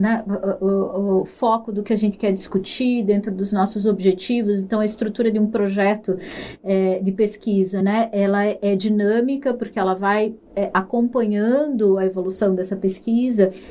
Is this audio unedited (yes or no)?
yes